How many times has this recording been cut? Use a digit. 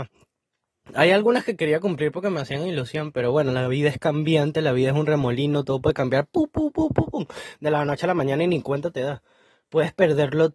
0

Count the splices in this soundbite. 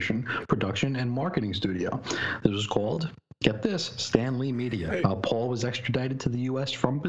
1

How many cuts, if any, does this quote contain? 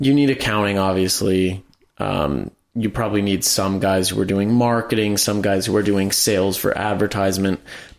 0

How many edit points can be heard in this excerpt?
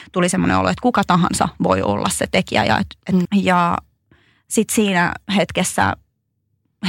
1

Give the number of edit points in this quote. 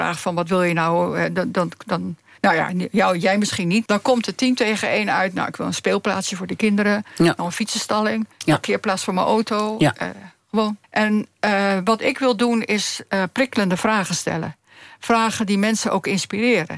2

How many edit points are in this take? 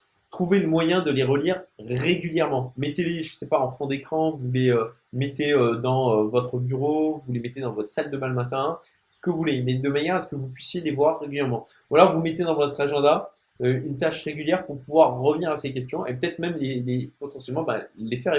0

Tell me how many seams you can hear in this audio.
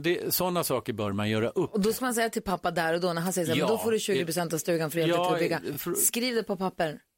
0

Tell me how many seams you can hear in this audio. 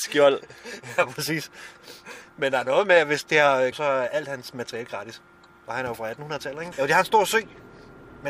2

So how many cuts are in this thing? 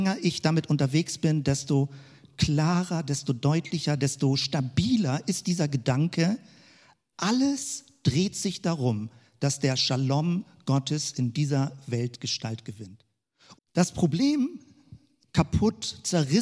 2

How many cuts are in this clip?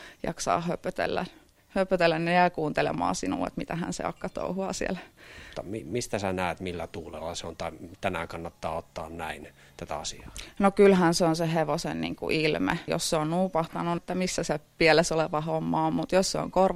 3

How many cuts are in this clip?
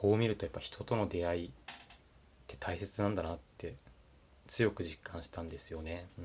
0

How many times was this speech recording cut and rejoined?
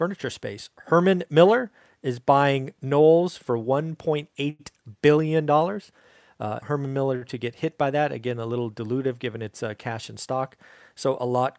1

